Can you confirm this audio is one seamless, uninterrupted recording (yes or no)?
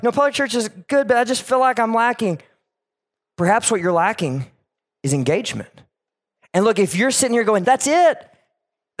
no